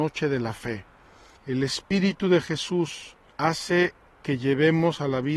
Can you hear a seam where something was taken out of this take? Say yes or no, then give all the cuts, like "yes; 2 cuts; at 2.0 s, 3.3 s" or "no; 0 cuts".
yes; 2 cuts; at 1.4 s, 3.3 s